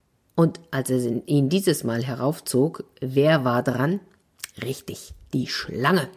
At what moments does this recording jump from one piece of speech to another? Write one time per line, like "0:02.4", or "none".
none